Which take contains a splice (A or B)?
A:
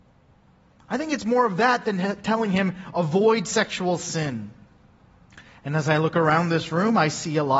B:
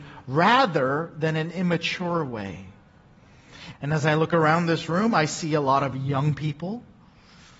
B